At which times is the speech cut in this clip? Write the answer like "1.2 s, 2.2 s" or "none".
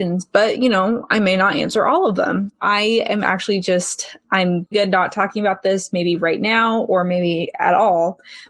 2.5 s, 4.7 s